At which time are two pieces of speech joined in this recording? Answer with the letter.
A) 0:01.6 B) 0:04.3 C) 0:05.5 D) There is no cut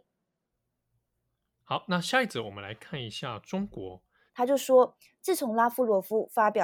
B